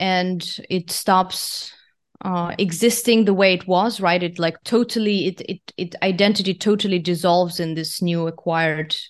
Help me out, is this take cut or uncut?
uncut